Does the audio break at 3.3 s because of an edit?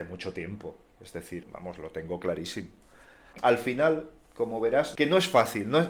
yes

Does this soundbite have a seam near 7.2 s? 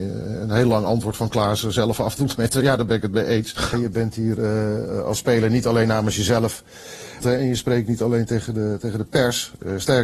yes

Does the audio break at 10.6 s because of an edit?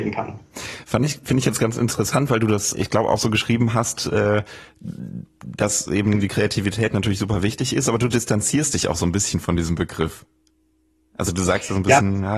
no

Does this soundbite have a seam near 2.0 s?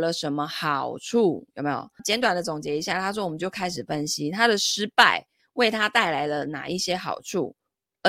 yes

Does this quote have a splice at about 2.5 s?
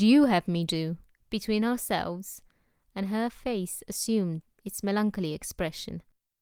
no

